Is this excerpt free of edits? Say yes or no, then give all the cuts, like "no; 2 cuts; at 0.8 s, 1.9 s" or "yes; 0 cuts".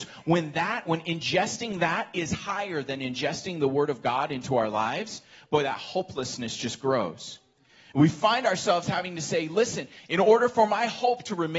yes; 0 cuts